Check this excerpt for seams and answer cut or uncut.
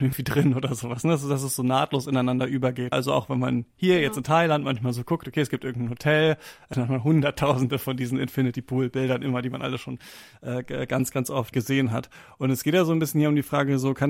cut